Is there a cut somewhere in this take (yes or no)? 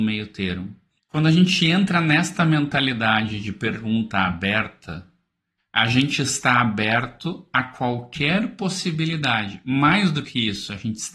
yes